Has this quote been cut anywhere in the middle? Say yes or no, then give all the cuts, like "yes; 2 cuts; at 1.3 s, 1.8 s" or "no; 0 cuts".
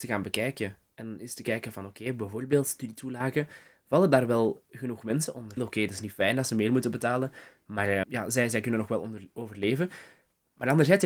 yes; 2 cuts; at 5.6 s, 8.0 s